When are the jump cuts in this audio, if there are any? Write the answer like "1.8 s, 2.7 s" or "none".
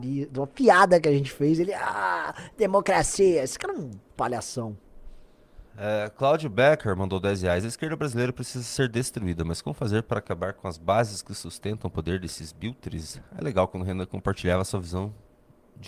5.7 s

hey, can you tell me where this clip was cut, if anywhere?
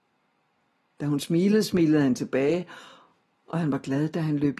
none

